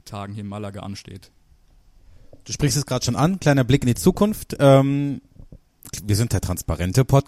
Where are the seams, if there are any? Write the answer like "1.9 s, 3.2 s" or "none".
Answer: none